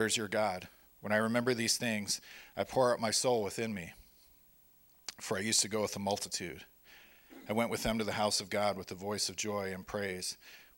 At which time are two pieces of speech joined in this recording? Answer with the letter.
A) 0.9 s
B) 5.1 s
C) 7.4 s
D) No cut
D